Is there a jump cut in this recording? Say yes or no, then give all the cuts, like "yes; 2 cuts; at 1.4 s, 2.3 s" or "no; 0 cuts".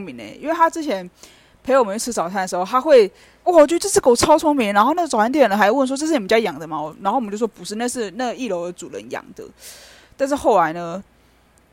yes; 1 cut; at 3.4 s